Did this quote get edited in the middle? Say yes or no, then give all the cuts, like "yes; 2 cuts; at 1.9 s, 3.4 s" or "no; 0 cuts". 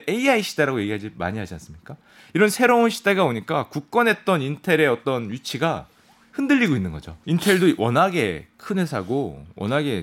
yes; 1 cut; at 7.2 s